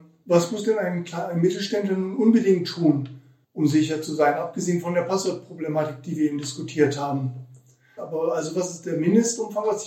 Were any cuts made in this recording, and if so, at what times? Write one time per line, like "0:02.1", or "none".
0:08.0